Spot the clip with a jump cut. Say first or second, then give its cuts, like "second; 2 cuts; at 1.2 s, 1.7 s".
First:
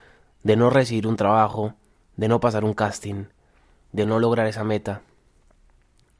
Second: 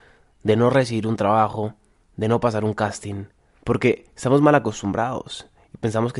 second; 1 cut; at 3.6 s